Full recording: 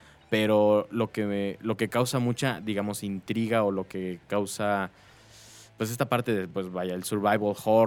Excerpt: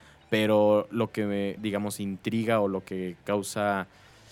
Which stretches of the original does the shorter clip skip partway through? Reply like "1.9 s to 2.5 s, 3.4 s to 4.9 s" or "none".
1.6 s to 2.6 s

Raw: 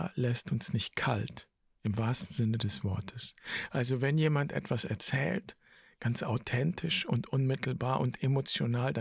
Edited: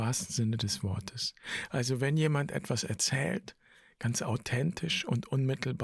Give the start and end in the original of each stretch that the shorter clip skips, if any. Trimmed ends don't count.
none

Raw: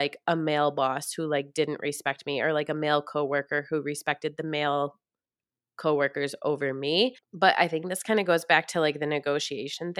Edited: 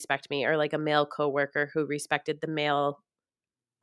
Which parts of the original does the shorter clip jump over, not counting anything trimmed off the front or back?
none

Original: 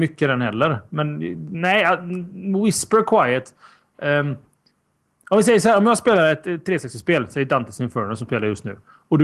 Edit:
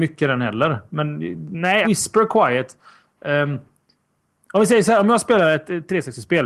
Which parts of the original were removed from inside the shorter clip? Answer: 1.8 s to 2.6 s

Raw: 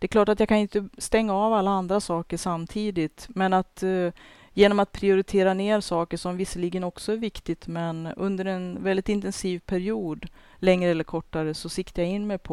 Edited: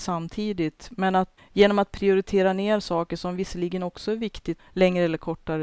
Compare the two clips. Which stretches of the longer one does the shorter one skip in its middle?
3.8 s to 4.4 s, 7.6 s to 10.4 s

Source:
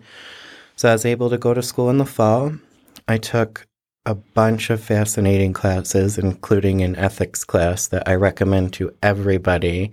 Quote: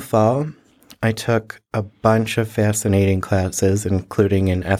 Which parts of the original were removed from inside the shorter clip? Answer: 3.7 s to 4.0 s

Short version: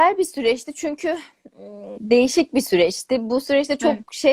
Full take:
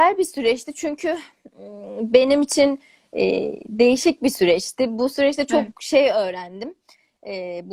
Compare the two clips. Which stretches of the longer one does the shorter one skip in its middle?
1.9 s to 3.6 s

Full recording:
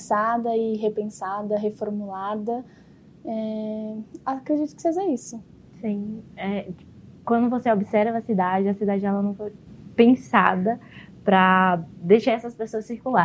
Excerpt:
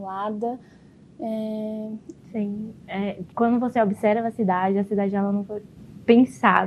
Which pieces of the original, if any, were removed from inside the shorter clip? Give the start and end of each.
4.2 s to 5.7 s, 6.8 s to 7.2 s

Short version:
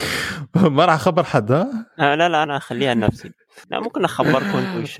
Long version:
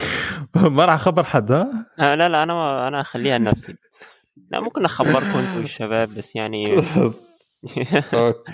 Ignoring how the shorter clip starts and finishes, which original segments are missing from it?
2.5 s to 2.9 s, 4.1 s to 4.4 s

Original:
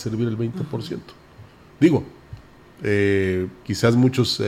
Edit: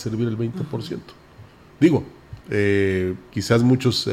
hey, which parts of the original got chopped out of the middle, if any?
2.4 s to 2.7 s

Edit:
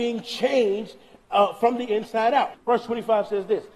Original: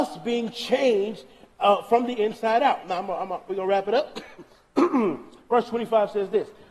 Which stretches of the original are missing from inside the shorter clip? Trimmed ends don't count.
2.8 s to 5.4 s

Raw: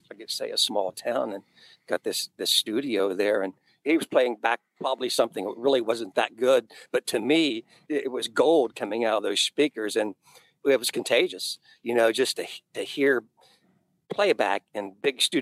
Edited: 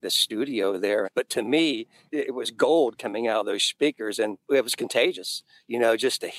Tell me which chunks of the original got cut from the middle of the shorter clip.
3.4 s to 6.8 s, 10.2 s to 10.6 s

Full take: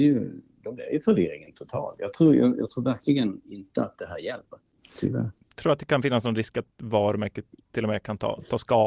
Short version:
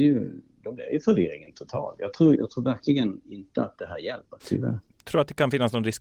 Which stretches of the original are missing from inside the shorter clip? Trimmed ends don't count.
2.3 s to 2.5 s, 4.6 s to 4.9 s

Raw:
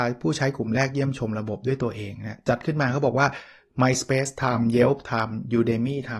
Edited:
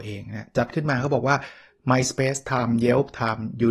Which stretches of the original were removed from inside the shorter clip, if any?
none

